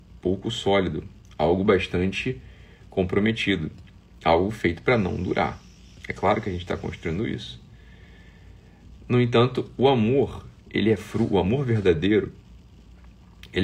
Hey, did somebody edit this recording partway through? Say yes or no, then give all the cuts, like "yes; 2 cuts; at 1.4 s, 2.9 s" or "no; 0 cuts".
no; 0 cuts